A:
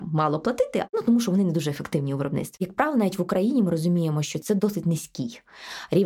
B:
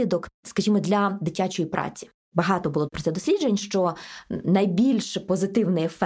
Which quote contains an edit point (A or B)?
A